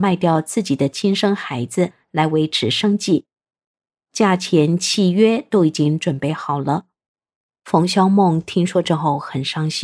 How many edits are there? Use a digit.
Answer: 0